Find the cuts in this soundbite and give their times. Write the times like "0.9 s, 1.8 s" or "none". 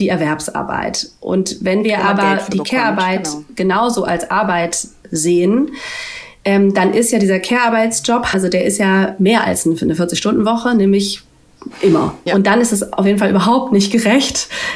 8.3 s, 12.3 s